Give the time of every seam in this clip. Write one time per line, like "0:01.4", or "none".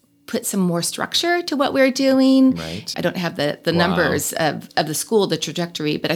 0:02.9